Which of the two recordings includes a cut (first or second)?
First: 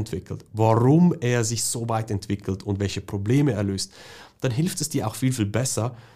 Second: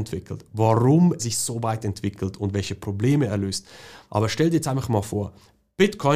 second